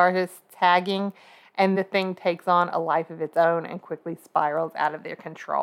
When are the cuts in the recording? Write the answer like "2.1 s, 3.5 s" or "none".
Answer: 1.8 s